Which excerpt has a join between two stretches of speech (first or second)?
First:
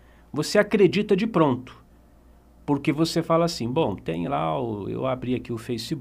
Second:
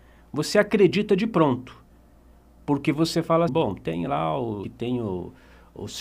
second